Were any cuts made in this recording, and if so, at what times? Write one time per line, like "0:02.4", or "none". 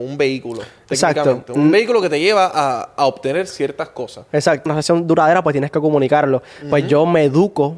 0:04.7

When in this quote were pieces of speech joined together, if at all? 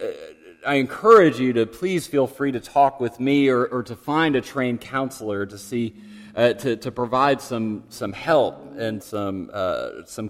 0:09.0

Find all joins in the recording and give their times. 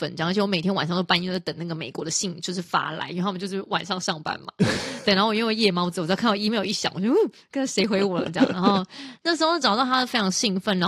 none

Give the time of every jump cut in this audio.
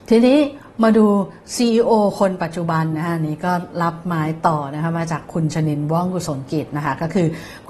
none

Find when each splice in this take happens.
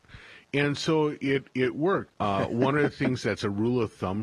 0:02.1

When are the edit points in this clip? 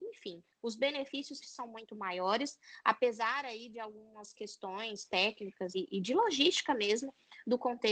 0:01.4
0:05.7

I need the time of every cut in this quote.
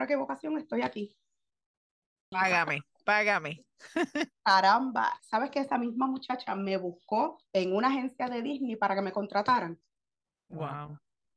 0:02.3
0:05.2
0:07.5

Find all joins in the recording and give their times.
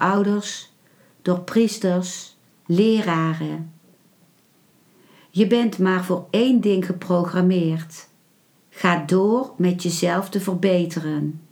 0:02.5

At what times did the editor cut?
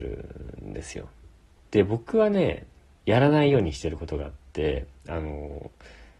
0:01.6
0:03.0
0:05.0

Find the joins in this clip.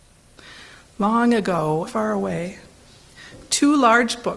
0:01.9

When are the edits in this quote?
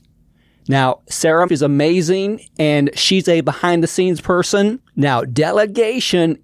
0:01.5
0:04.8

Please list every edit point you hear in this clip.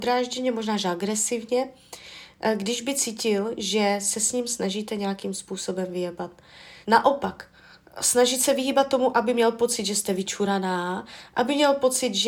0:06.8

